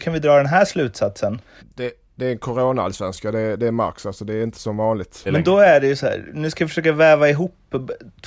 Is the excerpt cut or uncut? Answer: cut